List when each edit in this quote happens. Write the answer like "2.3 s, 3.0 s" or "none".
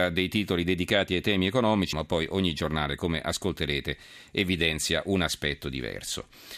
1.9 s